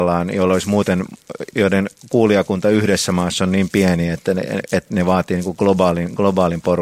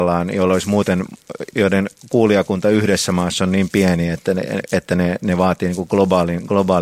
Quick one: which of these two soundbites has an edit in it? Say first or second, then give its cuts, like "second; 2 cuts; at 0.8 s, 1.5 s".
first; 1 cut; at 4.9 s